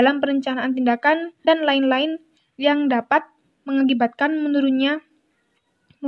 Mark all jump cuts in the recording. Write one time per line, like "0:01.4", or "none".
0:01.4